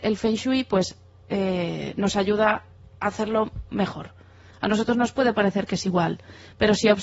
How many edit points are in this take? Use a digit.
1